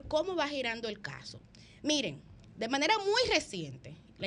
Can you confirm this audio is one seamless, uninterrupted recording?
yes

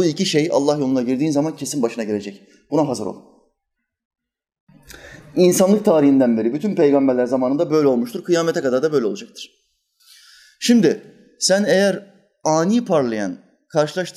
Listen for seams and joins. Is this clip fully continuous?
yes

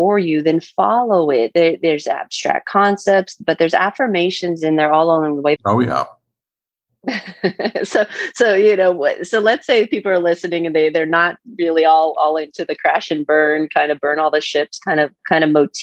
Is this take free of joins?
no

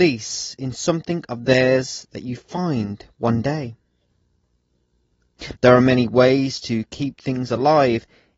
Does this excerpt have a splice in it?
yes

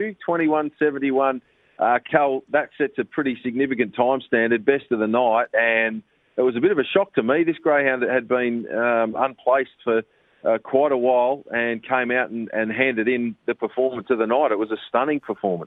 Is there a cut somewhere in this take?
no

